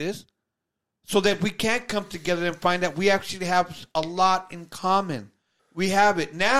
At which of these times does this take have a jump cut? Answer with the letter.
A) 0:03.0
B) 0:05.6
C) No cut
B